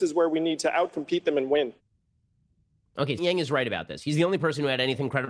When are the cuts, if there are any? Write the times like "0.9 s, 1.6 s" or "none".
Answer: 3.2 s